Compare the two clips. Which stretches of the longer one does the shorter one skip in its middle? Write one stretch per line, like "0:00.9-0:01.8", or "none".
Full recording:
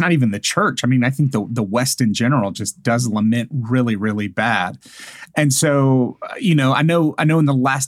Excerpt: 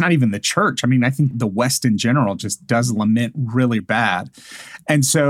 0:01.3-0:01.5
0:04.0-0:04.3